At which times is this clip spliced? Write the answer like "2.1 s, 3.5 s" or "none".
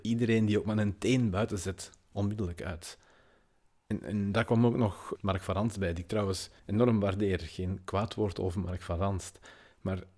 5.1 s, 6.6 s